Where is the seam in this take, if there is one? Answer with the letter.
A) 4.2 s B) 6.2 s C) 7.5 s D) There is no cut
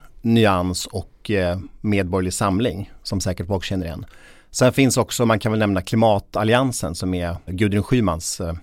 C